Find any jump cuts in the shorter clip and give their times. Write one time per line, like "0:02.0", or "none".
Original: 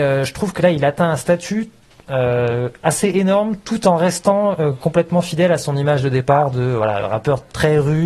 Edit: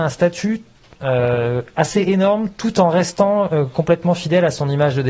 none